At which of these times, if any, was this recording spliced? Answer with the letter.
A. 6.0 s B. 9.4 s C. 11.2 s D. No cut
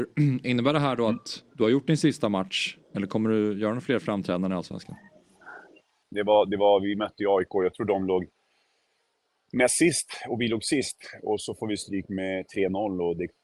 A